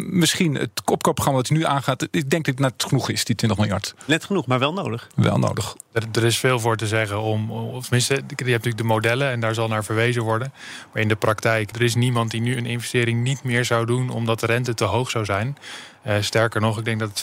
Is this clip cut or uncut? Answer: cut